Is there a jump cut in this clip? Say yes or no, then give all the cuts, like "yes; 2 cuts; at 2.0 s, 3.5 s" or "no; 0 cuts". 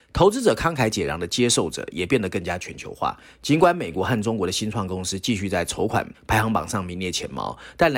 no; 0 cuts